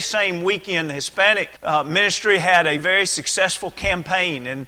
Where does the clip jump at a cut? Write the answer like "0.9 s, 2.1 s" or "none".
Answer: 1.6 s, 2.8 s